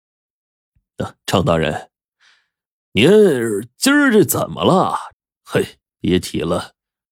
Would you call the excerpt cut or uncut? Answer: cut